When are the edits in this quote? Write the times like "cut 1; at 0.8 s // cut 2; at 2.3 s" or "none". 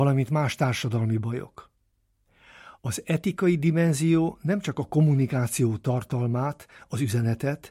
cut 1; at 2.8 s